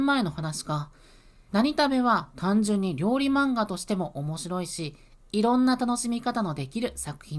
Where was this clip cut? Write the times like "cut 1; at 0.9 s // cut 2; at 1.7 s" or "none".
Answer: cut 1; at 1.5 s